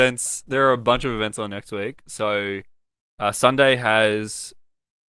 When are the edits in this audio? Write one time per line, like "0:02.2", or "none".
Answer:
none